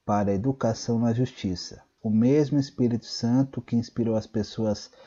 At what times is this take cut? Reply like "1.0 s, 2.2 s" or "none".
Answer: 2.0 s